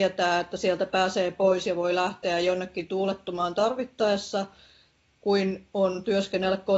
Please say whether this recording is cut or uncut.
uncut